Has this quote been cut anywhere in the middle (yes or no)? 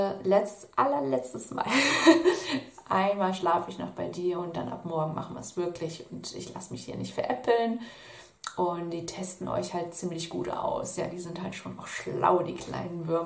no